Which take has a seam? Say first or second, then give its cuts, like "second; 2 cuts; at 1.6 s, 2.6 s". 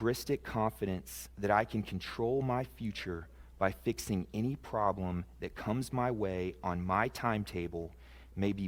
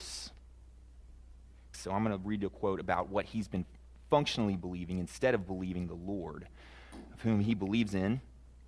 second; 1 cut; at 1.7 s